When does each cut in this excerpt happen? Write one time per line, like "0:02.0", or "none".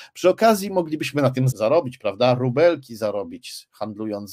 0:01.5